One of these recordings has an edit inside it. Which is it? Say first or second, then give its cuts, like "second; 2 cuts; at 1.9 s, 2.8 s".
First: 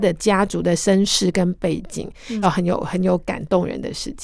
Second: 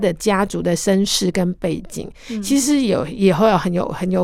first; 1 cut; at 2.4 s